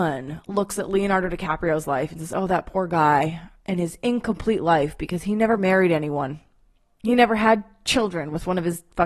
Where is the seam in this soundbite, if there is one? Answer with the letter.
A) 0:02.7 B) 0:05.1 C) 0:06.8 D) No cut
D